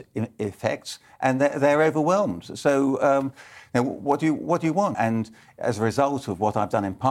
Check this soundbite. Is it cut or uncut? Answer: cut